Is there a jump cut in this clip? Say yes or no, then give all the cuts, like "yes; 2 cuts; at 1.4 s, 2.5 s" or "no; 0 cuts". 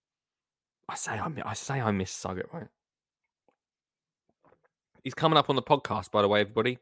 no; 0 cuts